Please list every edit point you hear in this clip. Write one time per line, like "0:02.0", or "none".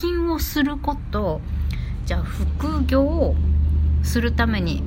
0:01.0